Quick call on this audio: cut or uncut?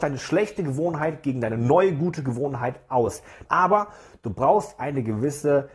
cut